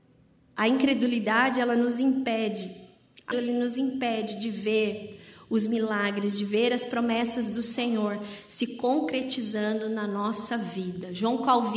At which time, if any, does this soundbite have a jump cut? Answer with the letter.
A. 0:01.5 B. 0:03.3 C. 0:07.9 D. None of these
B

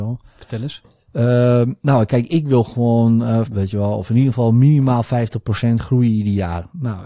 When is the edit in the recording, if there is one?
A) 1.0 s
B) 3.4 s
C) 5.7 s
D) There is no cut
B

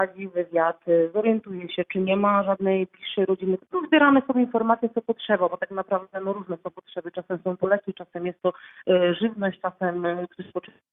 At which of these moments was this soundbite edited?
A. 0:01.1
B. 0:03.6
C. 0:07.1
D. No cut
B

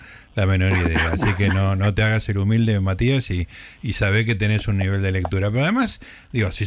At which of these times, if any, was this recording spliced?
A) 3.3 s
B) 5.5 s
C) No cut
C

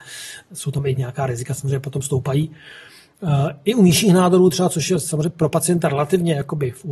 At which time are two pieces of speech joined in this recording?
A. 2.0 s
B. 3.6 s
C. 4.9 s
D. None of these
D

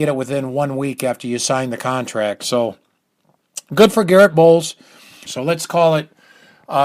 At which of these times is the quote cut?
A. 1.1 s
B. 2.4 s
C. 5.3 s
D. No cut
C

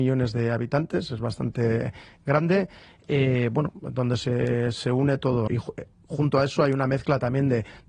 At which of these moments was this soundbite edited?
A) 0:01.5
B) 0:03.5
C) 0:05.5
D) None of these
C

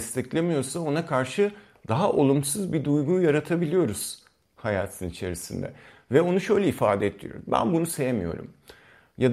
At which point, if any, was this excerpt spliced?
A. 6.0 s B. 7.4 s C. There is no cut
C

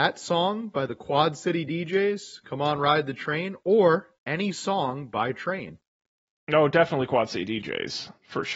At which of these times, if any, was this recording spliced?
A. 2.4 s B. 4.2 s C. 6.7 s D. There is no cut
D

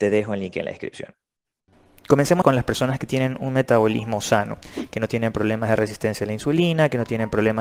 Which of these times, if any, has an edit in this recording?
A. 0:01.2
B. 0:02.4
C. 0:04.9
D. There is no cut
B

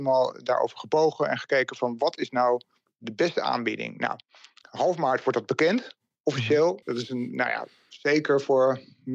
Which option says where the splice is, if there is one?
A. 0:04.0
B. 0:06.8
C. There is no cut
B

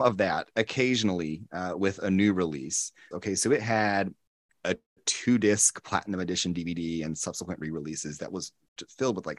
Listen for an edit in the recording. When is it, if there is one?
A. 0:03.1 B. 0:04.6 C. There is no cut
A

